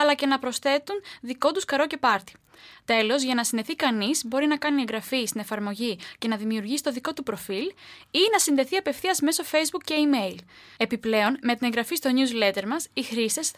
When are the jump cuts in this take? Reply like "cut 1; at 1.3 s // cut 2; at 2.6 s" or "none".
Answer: none